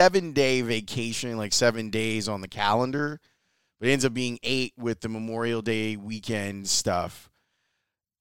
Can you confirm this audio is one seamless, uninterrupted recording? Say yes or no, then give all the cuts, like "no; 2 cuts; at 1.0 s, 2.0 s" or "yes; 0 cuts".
yes; 0 cuts